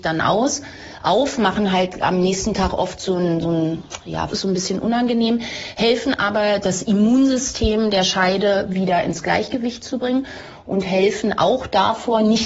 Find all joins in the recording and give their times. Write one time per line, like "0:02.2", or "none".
0:04.3